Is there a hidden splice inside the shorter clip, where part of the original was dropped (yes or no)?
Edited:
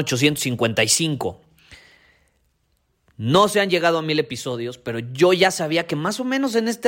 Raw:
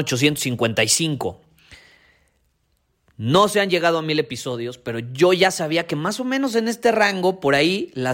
no